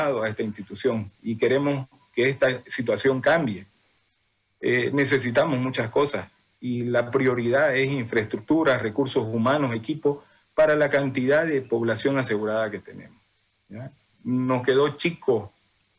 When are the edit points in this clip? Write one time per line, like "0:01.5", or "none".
none